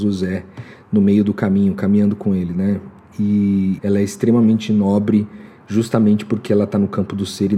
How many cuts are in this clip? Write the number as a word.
one